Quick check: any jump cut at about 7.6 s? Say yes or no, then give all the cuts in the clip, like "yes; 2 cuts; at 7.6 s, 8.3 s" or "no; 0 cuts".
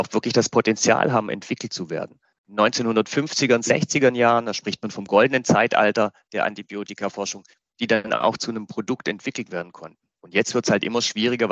yes; 1 cut; at 7.6 s